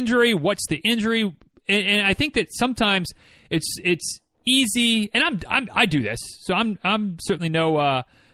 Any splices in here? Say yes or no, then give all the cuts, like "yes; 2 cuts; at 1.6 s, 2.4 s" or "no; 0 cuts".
no; 0 cuts